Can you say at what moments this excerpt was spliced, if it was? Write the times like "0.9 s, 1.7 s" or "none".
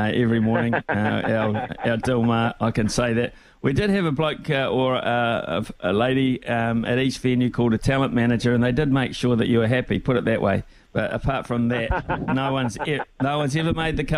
none